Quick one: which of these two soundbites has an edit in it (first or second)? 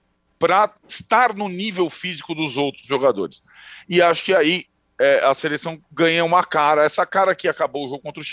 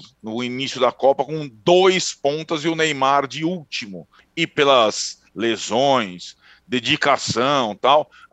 second